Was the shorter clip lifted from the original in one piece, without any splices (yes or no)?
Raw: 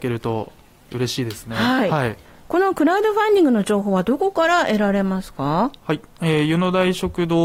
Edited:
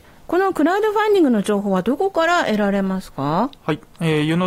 yes